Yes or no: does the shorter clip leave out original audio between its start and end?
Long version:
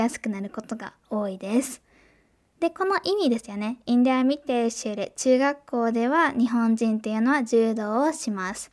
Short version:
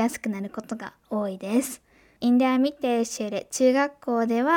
yes